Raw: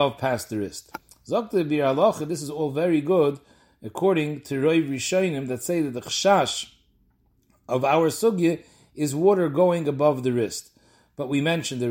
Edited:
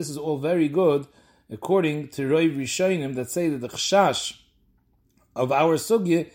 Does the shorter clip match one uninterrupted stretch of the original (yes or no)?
yes